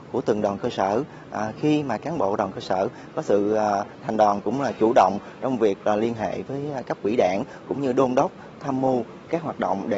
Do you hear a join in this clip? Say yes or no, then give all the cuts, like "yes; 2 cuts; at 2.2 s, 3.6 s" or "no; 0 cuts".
yes; 1 cut; at 4.0 s